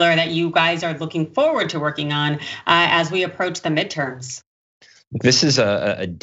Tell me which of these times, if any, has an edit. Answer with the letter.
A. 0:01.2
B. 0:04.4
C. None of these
C